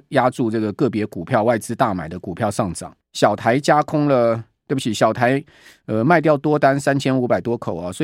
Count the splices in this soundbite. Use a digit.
1